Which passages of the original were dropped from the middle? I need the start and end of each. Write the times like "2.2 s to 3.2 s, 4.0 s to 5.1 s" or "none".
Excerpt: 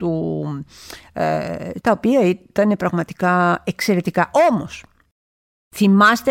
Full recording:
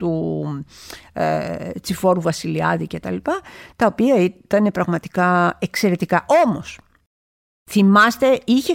1.8 s to 3.8 s